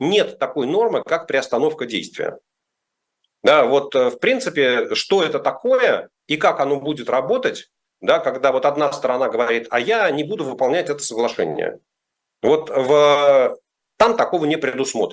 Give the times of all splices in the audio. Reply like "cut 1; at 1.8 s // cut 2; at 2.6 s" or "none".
none

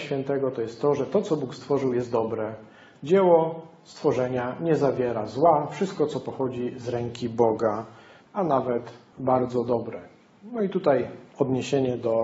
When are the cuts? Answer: cut 1; at 8.2 s

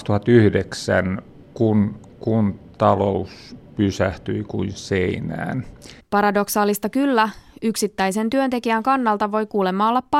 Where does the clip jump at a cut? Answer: cut 1; at 6.0 s

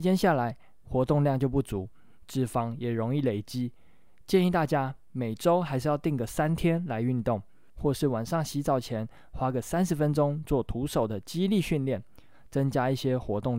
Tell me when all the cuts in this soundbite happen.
none

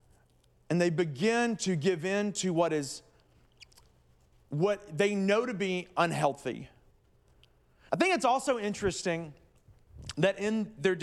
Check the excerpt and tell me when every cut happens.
cut 1; at 7.9 s

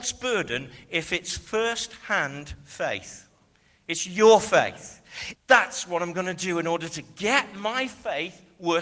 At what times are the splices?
cut 1; at 5.3 s

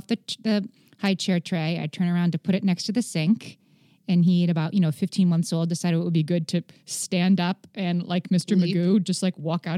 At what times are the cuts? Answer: none

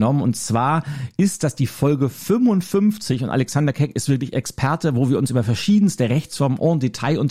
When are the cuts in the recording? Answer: none

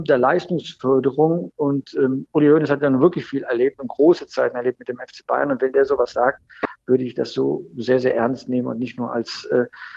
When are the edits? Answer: none

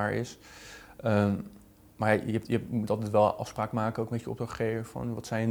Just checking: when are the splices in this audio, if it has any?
none

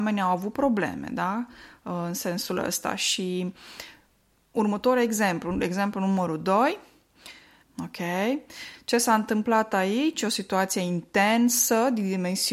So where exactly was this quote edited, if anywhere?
cut 1; at 7.6 s

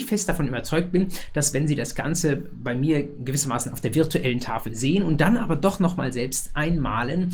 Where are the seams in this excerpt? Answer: none

